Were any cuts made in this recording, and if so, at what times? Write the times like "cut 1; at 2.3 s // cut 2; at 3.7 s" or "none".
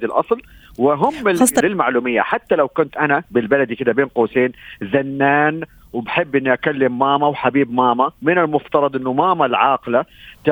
cut 1; at 1.6 s